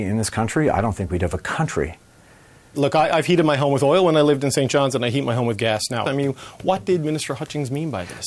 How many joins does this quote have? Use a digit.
2